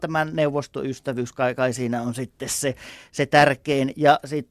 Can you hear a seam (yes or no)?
no